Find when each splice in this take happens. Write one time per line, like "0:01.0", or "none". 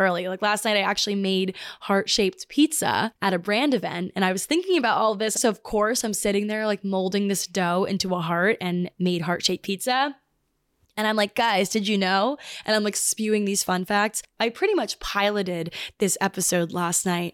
0:05.4